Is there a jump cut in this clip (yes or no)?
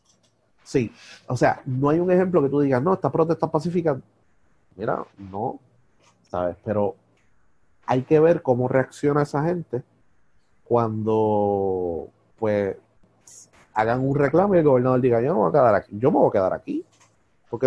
no